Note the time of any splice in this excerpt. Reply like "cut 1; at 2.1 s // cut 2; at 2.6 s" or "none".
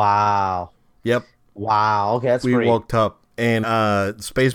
cut 1; at 3.6 s